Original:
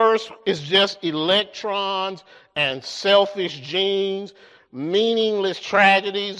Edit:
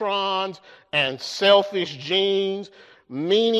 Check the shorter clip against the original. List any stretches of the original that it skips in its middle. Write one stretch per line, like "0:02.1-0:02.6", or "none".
none

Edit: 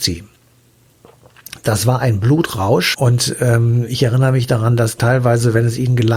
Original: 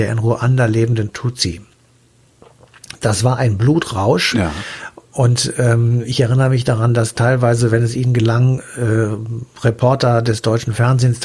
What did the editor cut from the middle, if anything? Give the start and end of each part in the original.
0:04.3-0:05.1

